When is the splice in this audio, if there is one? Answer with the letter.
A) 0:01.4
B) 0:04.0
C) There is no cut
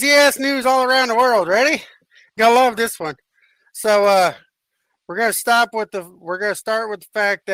C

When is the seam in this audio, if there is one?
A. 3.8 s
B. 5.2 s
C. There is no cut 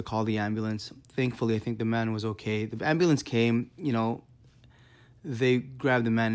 C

